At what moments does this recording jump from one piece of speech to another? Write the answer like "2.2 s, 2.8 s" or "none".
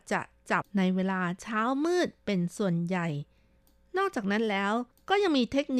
none